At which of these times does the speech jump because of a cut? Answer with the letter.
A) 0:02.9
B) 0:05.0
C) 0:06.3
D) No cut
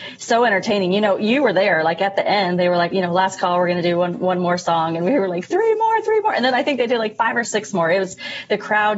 A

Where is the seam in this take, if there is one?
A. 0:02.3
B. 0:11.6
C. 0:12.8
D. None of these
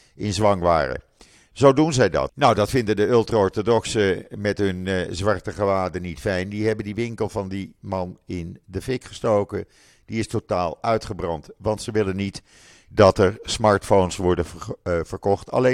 A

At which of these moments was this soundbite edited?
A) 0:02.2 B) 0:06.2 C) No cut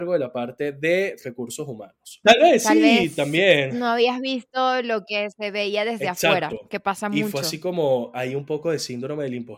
A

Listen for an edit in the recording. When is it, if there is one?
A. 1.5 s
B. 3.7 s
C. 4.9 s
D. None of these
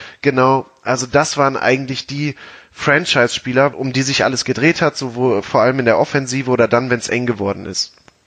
B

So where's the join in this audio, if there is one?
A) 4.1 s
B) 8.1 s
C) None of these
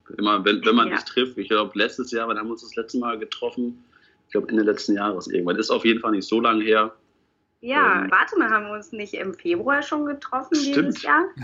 B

